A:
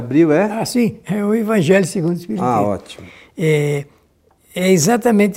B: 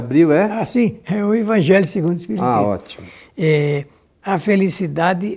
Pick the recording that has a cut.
B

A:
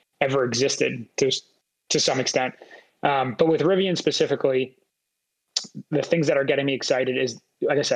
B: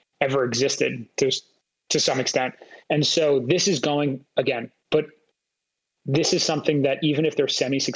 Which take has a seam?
B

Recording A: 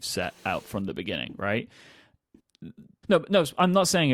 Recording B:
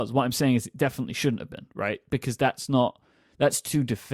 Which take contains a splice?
A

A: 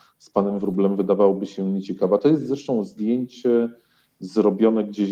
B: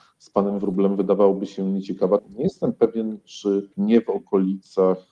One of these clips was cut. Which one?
B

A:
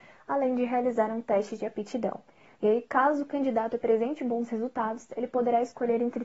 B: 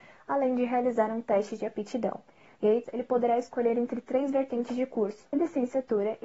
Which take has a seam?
B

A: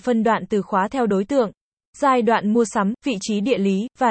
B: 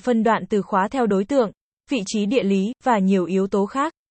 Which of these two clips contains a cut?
B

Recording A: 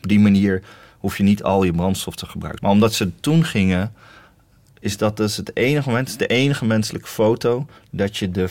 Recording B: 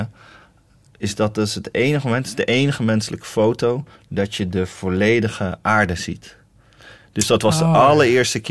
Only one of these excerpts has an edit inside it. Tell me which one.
A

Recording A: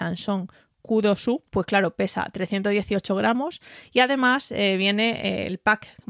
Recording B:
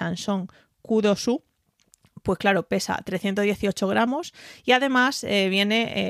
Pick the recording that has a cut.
A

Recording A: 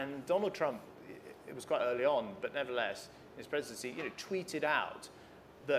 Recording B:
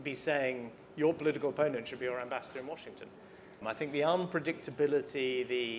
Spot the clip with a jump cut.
B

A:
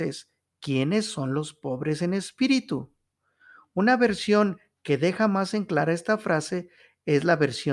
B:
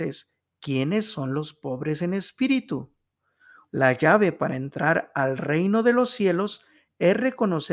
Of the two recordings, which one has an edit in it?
B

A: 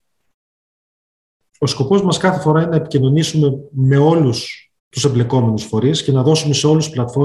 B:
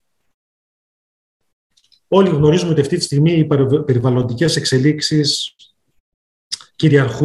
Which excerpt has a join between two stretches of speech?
A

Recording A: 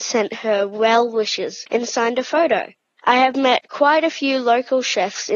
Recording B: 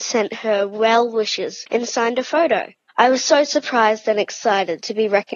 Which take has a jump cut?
B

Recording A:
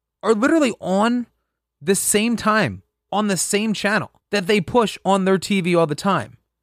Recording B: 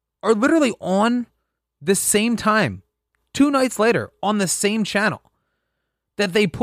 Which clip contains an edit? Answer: A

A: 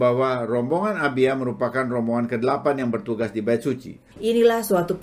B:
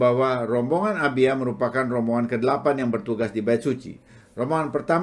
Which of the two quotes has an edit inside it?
A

